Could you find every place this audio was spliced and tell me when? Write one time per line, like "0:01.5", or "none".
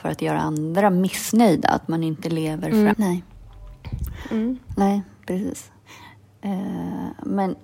0:02.9